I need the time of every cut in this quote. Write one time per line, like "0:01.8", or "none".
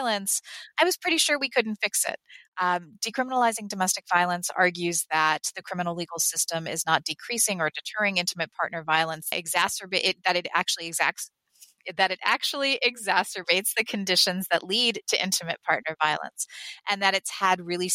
0:09.3

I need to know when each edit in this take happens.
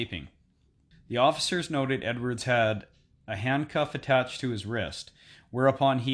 0:00.9

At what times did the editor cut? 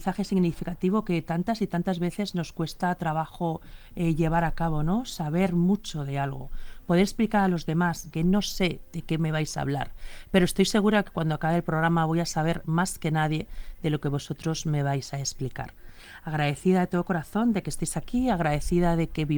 0:08.1

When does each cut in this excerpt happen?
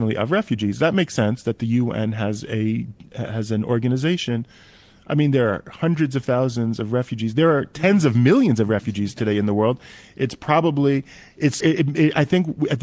0:11.6

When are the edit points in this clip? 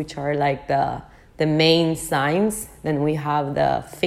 none

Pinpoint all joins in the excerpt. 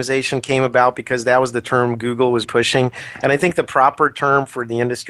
0:02.4

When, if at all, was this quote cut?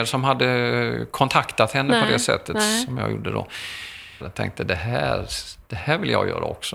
0:04.2

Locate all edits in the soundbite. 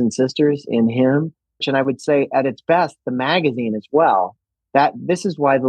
0:01.6

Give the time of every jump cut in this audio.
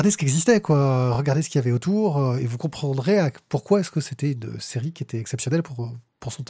none

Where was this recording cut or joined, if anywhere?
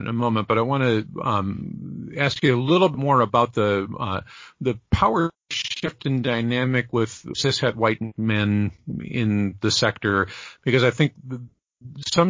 0:07.3

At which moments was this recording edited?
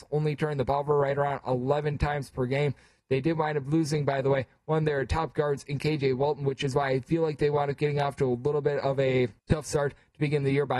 0:09.4

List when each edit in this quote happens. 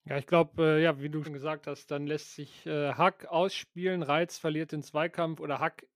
0:01.2

